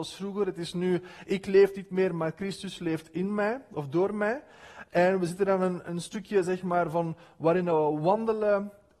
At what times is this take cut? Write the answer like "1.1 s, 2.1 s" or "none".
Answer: 5.8 s

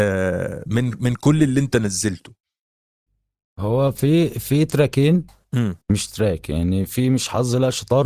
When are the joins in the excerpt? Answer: 5.8 s, 6.9 s

